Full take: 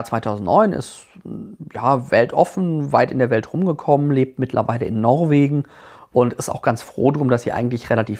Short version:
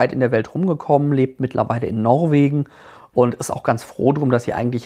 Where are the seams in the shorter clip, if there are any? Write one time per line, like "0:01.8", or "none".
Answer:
none